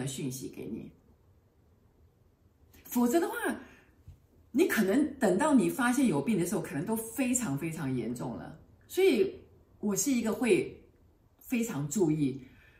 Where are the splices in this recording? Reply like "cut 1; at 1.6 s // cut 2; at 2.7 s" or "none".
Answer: none